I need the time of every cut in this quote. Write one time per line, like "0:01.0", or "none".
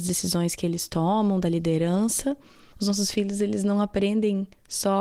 0:02.7